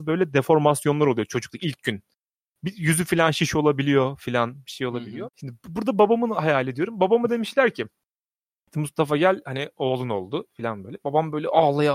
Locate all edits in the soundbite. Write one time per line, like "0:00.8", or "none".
0:05.3